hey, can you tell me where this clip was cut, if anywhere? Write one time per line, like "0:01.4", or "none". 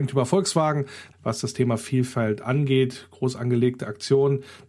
0:01.1